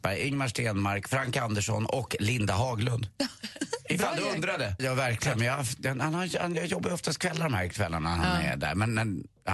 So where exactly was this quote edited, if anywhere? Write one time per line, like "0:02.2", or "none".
0:04.8